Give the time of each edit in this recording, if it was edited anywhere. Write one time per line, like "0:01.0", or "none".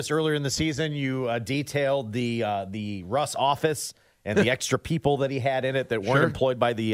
0:04.3

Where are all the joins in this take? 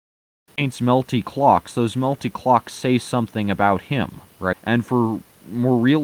0:04.5

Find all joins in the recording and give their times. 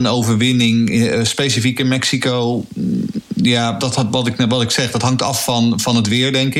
0:03.8

